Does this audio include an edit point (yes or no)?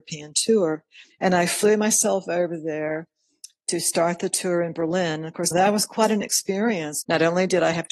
yes